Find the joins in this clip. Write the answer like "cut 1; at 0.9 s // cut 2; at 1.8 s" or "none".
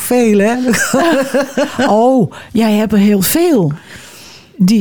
none